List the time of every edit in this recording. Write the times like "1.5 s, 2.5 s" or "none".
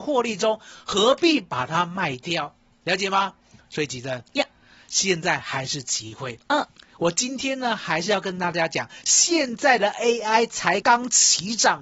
10.8 s